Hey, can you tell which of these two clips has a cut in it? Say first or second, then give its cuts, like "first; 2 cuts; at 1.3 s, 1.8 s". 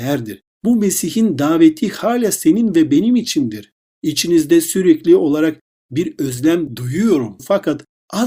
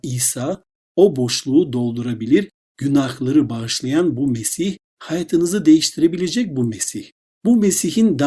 second; 1 cut; at 7.3 s